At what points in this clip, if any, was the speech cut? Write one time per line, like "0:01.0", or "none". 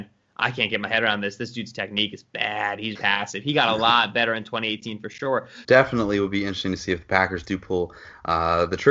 0:03.0
0:05.6